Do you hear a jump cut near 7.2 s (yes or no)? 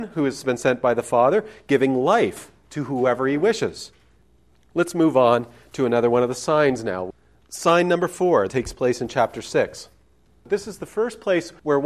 no